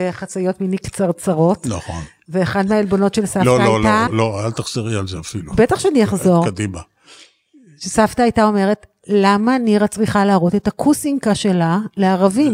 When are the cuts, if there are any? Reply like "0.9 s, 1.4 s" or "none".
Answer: 4.1 s